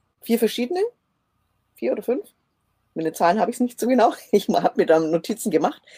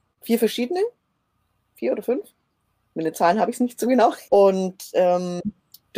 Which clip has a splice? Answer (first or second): second